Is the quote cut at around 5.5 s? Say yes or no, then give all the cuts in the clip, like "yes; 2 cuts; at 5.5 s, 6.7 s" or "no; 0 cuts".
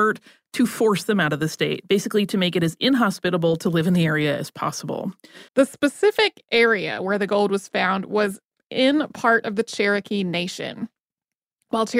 yes; 1 cut; at 5.5 s